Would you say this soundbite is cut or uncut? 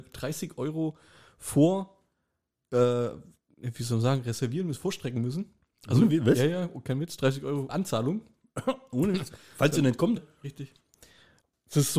cut